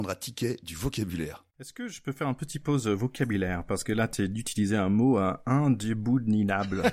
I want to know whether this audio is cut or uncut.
cut